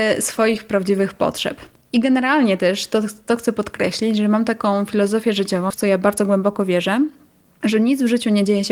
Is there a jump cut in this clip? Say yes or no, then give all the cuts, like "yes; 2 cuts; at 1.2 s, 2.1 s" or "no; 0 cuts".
yes; 1 cut; at 5.7 s